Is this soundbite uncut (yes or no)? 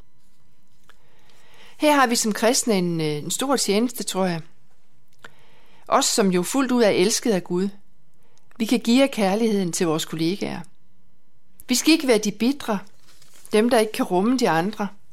no